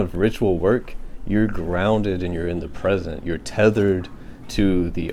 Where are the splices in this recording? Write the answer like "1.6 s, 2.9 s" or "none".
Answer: none